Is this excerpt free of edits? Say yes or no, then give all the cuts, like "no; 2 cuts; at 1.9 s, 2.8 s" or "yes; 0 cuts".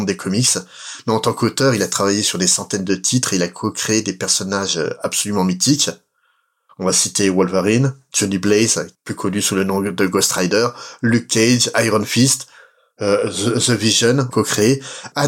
no; 1 cut; at 14.3 s